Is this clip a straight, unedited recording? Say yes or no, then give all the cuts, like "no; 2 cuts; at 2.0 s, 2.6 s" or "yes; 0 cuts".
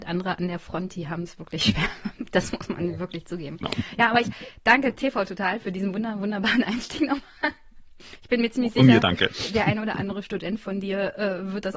yes; 0 cuts